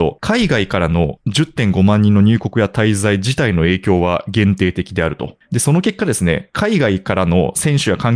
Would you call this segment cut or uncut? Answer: cut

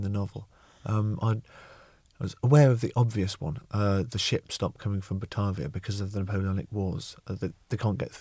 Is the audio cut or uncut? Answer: uncut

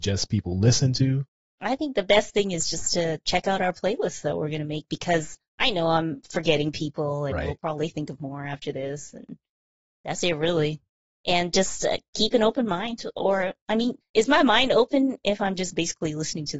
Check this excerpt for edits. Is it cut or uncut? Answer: uncut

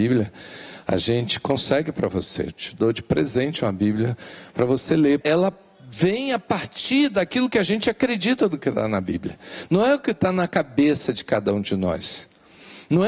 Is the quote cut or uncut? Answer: cut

